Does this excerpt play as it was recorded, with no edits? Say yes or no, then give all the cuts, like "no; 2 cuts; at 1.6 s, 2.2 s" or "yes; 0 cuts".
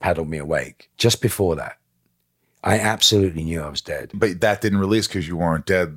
no; 2 cuts; at 0.9 s, 4.1 s